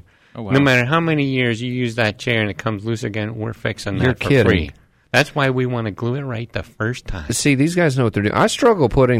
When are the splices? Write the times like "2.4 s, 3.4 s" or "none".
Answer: none